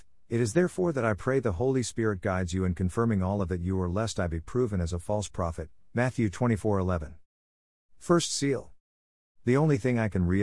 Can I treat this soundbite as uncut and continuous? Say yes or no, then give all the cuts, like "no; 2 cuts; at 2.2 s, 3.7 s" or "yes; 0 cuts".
no; 1 cut; at 9.3 s